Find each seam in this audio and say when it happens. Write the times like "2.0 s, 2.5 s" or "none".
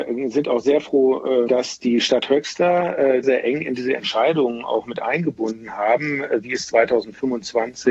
3.2 s